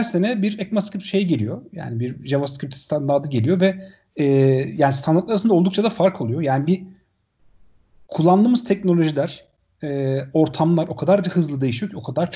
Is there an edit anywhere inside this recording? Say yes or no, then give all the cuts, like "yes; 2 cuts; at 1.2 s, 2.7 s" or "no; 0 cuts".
no; 0 cuts